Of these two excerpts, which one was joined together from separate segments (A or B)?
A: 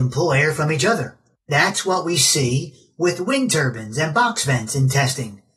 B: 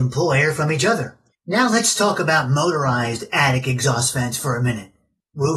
B